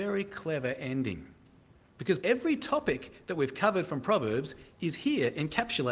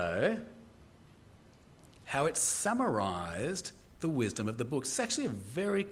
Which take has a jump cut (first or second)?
first